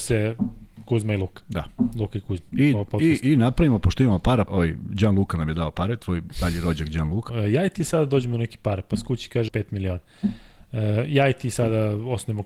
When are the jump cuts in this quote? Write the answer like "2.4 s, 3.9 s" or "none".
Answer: 4.5 s, 7.3 s, 9.5 s